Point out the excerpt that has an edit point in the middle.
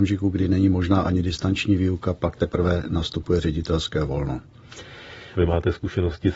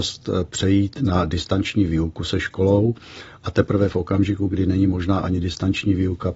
first; 1 cut; at 5.3 s

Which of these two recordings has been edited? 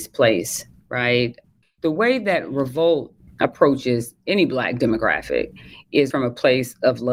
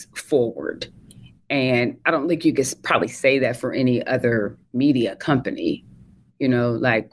first; 2 cuts; at 1.6 s, 6.1 s

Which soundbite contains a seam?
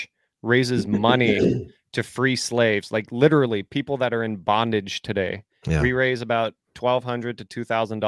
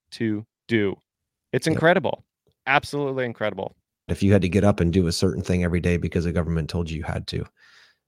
second; 1 cut; at 4.1 s

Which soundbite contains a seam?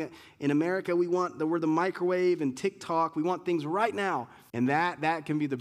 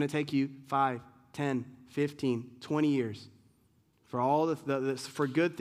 first; 1 cut; at 4.5 s

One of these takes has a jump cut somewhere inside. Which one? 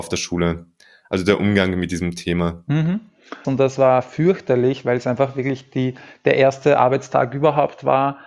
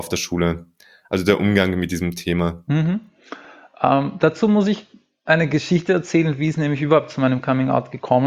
first; 1 cut; at 3.4 s

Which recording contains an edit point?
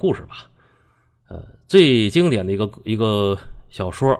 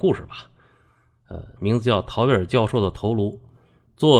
second; 1 cut; at 1.6 s

